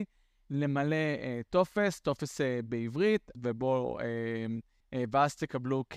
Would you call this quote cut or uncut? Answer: cut